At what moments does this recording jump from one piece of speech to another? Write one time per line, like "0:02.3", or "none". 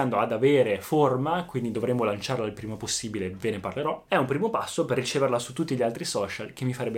0:04.1